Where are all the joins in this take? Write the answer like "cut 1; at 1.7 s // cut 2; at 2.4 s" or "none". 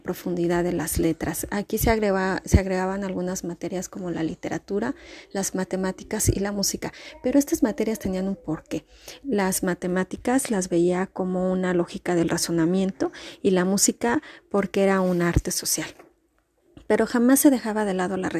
none

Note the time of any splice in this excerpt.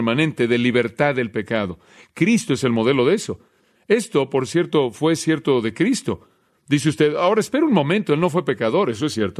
none

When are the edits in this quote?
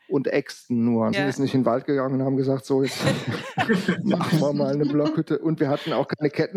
cut 1; at 1.1 s

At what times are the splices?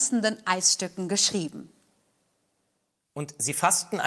none

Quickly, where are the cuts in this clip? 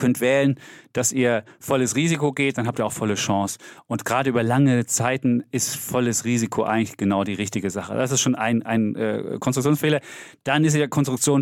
none

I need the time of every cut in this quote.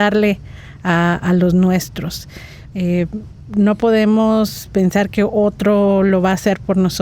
cut 1; at 2.7 s

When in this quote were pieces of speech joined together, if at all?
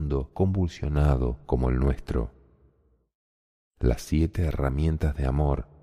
cut 1; at 3.6 s

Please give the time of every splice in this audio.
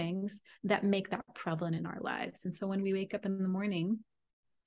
none

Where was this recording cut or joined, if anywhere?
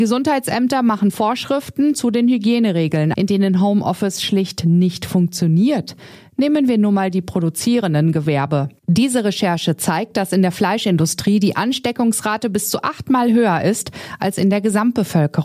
cut 1; at 3.1 s

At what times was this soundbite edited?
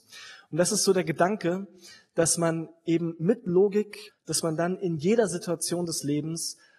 cut 1; at 4.1 s

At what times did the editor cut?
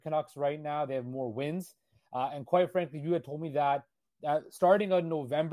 none

